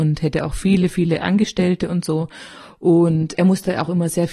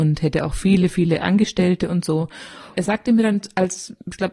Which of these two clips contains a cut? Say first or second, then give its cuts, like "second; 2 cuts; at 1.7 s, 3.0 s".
second; 1 cut; at 2.7 s